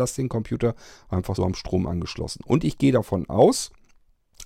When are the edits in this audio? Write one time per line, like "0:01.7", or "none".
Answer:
0:01.4